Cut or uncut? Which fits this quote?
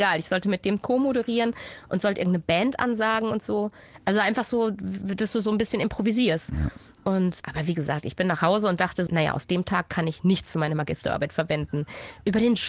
cut